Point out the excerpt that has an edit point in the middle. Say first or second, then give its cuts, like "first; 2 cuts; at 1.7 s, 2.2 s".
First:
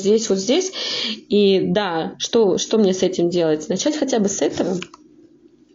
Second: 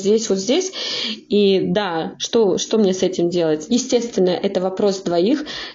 second; 1 cut; at 3.7 s